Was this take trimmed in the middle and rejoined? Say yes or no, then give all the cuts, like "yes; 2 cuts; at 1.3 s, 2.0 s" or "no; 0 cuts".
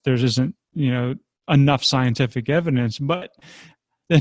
no; 0 cuts